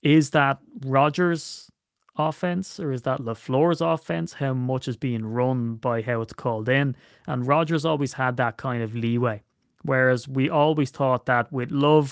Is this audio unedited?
yes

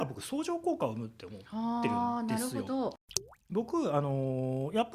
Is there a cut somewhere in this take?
yes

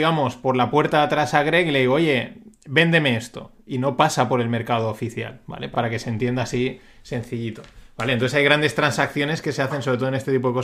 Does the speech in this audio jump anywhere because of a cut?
no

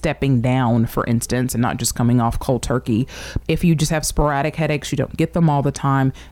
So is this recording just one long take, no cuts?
no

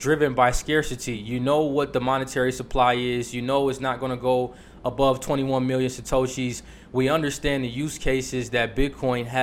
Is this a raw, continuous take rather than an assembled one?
yes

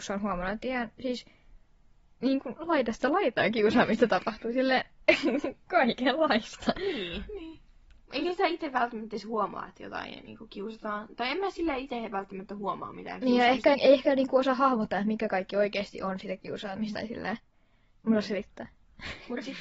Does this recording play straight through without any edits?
no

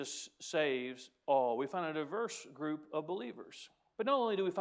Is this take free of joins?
yes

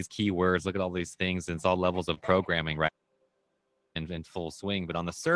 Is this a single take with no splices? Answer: yes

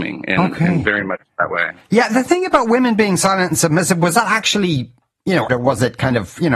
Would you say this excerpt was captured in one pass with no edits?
no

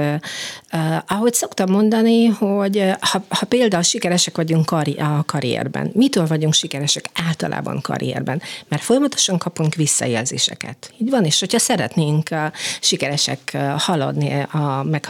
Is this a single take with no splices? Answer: yes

